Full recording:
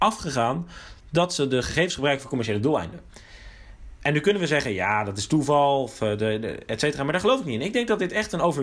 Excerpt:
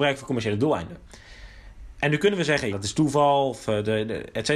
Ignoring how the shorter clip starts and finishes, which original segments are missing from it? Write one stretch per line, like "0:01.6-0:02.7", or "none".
0:04.7-0:05.0